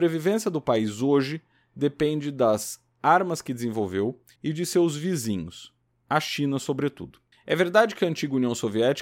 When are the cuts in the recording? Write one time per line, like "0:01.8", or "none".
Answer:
0:04.4
0:07.3